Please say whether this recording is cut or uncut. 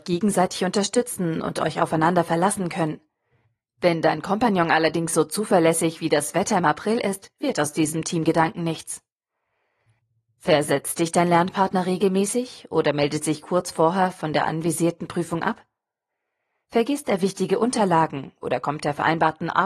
uncut